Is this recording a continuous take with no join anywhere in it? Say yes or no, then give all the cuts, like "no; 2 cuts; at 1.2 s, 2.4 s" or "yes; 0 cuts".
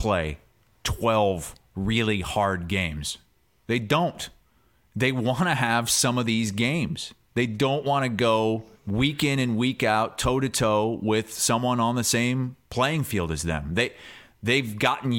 no; 1 cut; at 8.7 s